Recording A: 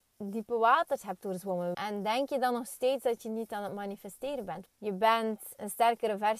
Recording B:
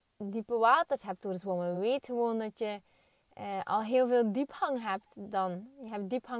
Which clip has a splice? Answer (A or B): A